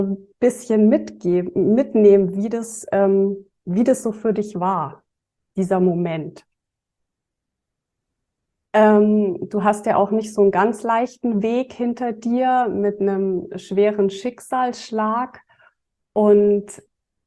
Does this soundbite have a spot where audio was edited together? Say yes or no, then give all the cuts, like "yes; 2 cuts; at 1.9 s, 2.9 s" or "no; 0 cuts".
yes; 1 cut; at 8.7 s